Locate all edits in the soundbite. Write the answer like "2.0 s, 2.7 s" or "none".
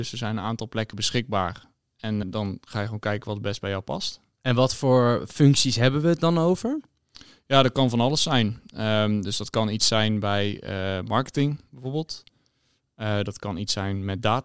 2.2 s